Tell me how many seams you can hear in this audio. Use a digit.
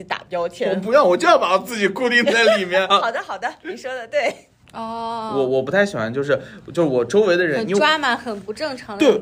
2